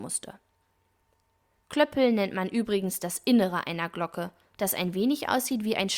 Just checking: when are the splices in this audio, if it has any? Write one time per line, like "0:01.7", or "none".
0:01.6

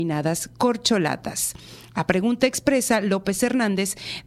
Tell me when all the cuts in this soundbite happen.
none

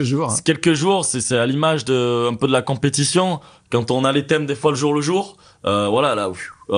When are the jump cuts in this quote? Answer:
none

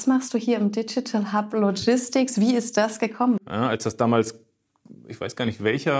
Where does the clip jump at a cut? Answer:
0:03.4

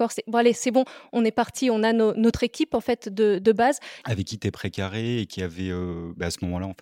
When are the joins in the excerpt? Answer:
0:04.0

